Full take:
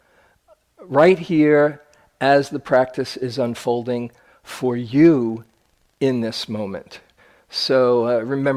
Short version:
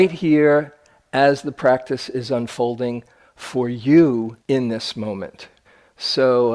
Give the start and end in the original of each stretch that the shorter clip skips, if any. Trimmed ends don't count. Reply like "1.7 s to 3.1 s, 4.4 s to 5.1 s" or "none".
5.5 s to 5.9 s